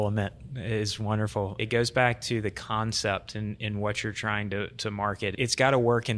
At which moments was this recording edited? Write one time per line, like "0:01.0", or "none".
none